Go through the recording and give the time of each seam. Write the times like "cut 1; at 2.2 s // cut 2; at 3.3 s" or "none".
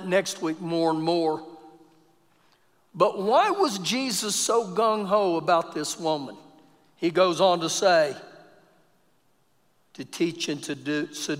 none